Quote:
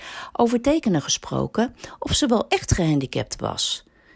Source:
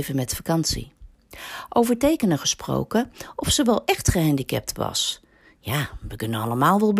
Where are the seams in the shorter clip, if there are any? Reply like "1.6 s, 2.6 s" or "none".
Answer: none